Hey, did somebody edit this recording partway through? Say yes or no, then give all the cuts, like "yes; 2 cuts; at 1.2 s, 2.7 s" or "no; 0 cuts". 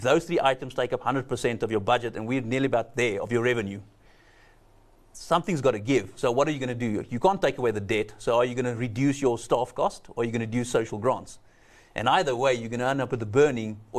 no; 0 cuts